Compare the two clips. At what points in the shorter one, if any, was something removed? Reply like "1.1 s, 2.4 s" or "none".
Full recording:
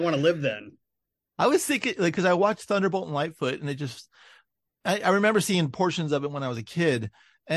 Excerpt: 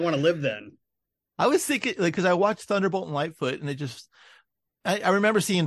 none

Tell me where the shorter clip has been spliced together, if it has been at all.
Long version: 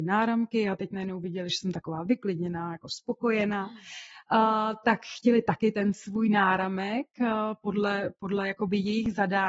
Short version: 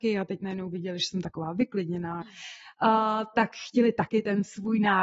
2.2 s

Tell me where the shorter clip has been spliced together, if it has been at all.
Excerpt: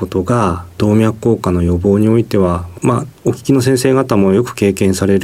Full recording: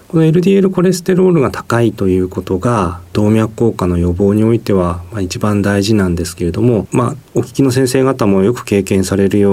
2.8 s

